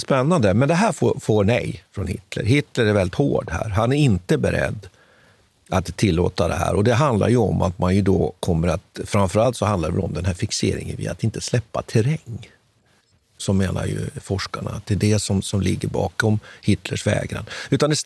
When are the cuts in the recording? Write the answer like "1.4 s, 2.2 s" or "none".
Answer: none

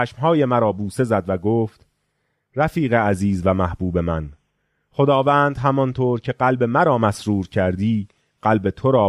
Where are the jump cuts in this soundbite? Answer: none

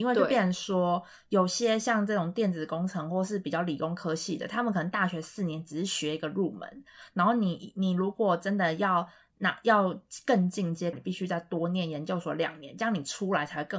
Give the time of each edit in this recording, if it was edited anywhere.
10.9 s

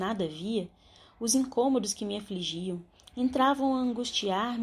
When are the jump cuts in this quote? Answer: 3.1 s

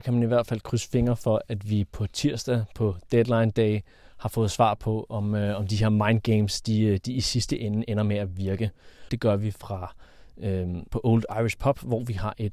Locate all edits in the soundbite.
9.1 s, 10.9 s

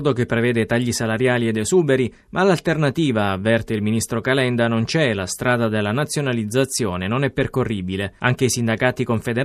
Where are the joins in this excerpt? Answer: none

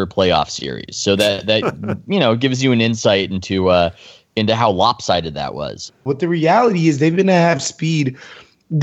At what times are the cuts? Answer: 6.1 s

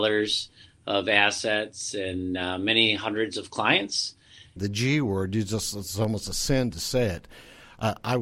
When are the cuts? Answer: 4.6 s

